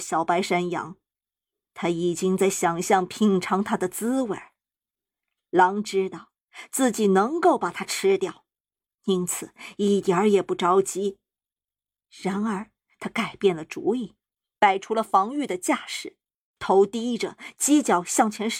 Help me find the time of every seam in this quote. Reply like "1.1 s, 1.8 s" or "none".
11.6 s